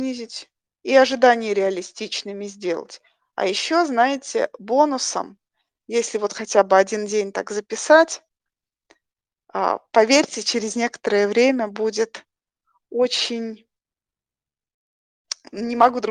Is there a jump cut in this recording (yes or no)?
no